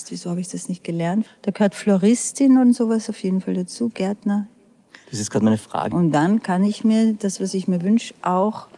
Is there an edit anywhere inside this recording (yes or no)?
yes